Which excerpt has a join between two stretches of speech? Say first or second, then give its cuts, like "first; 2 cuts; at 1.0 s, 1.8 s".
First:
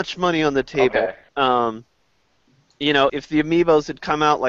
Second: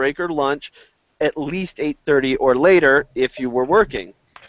first; 2 cuts; at 1.3 s, 3.1 s